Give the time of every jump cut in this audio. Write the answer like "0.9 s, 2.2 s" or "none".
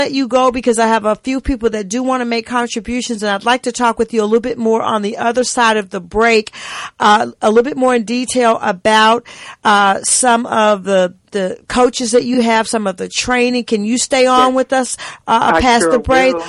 none

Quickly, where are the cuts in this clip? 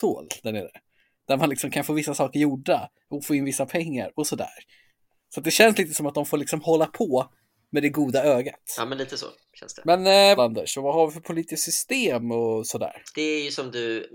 10.4 s, 13.1 s

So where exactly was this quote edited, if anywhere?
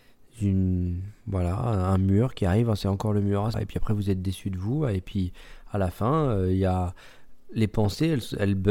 3.5 s

